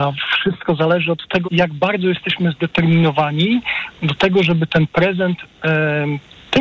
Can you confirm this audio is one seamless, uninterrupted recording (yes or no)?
no